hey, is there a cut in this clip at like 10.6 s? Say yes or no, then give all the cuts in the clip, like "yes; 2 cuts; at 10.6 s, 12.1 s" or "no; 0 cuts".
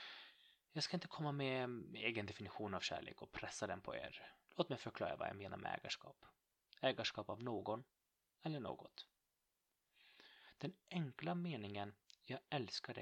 no; 2 cuts; at 4.5 s, 6.6 s